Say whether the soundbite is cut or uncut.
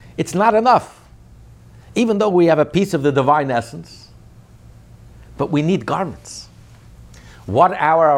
uncut